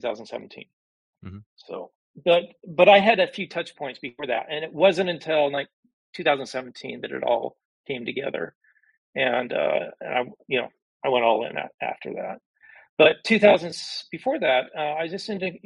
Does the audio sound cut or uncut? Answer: uncut